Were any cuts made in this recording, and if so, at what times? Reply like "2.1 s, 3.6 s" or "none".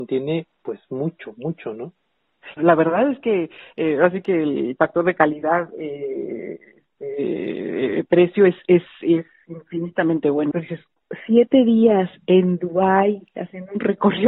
2.6 s, 10.5 s